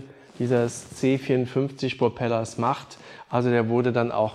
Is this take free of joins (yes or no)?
yes